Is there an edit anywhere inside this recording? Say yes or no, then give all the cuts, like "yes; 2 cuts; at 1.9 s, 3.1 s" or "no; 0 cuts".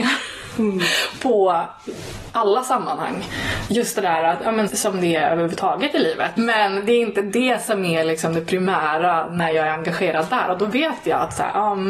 yes; 2 cuts; at 4.7 s, 6.4 s